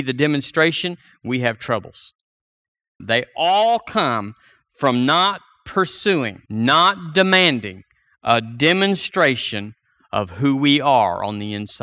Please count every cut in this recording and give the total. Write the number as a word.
two